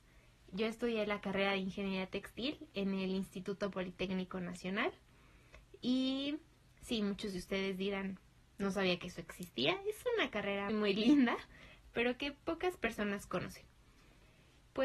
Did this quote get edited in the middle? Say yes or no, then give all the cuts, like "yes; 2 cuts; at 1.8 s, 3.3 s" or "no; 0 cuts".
yes; 1 cut; at 10.7 s